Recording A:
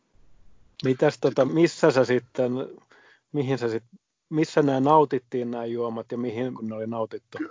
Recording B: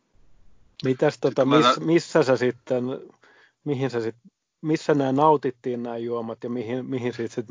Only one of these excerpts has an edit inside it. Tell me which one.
A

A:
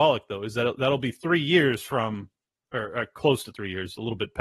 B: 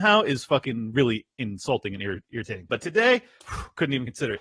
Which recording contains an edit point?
B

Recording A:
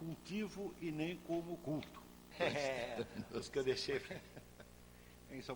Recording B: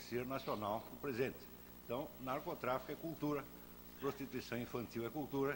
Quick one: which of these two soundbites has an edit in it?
A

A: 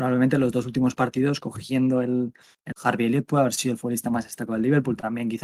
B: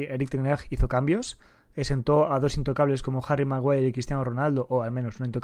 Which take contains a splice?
A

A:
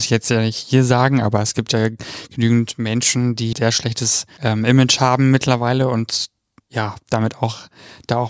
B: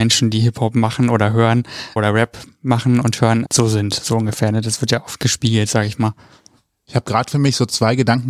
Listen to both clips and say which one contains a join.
A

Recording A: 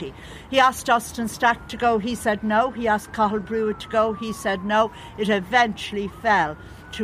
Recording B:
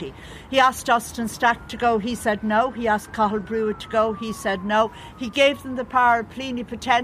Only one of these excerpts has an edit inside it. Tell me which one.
B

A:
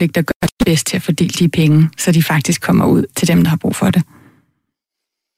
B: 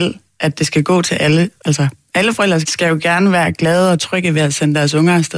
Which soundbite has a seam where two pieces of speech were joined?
B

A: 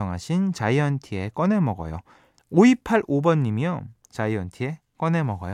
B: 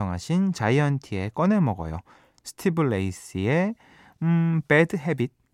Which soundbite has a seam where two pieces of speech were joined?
A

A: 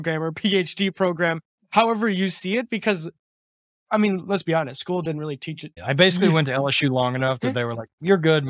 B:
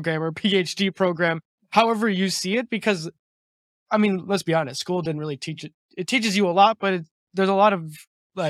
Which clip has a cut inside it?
A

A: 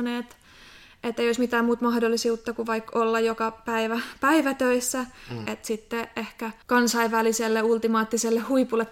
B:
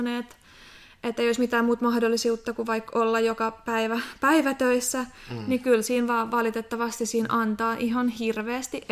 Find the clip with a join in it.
A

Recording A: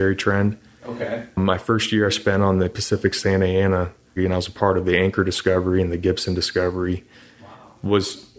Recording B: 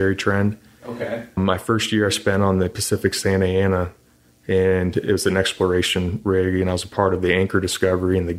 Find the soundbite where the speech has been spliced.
A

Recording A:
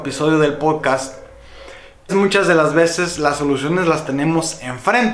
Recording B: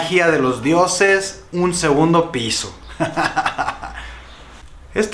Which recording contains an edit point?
A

